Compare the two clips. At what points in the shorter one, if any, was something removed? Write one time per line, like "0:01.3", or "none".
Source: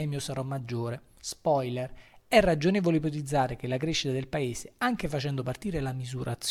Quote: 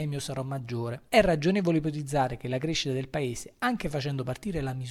0:01.1